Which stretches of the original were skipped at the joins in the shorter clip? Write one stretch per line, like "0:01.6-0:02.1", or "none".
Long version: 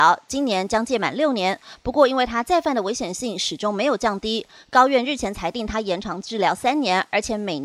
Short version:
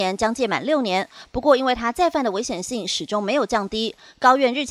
none